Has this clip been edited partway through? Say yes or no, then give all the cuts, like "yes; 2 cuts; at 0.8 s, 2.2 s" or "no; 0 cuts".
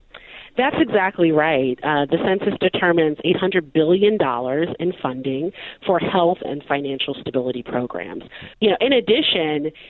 yes; 2 cuts; at 6.4 s, 8.5 s